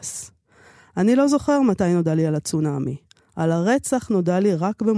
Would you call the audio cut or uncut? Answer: uncut